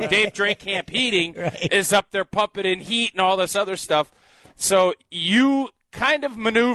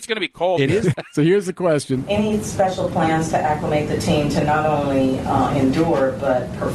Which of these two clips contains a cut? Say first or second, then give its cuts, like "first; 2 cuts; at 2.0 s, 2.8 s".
second; 1 cut; at 0.9 s